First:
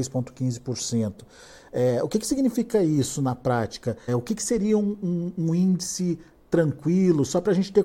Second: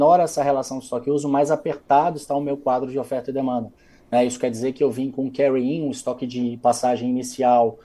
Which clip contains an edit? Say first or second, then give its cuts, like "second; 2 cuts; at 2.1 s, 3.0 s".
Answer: first; 1 cut; at 4.1 s